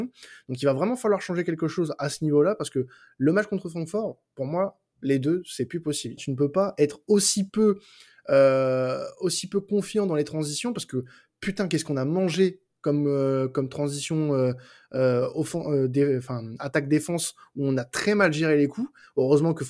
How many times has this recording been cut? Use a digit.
1